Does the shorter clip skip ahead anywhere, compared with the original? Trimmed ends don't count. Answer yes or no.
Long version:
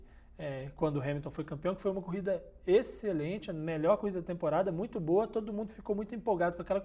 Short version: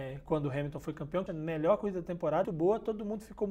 yes